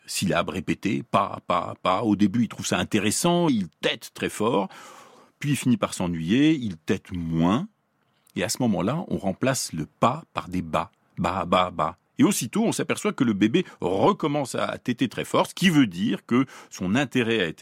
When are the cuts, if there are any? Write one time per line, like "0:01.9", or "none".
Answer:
0:01.5
0:03.5